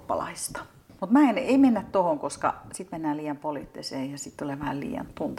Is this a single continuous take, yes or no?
no